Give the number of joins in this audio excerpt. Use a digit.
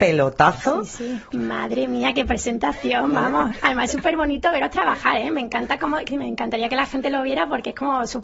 1